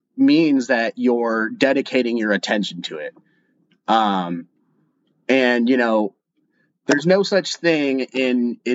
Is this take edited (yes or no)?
no